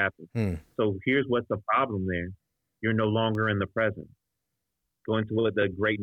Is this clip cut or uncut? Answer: uncut